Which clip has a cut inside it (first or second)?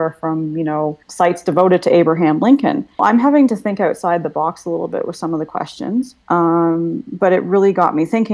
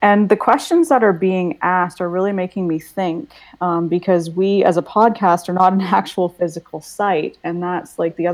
first